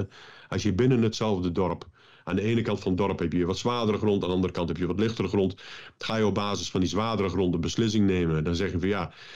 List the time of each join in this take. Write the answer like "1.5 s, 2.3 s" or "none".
none